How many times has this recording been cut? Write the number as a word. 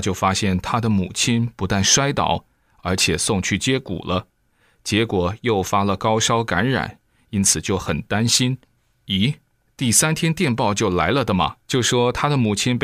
one